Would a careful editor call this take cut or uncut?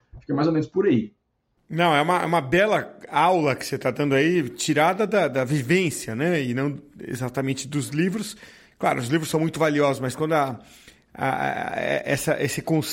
uncut